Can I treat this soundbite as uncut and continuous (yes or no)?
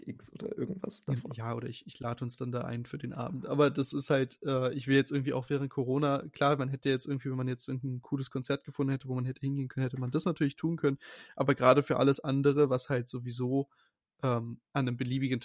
yes